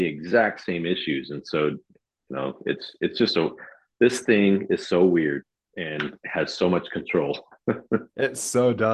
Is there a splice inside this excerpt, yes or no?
no